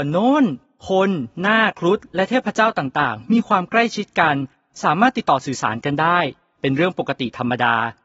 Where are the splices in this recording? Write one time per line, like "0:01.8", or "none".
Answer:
0:01.7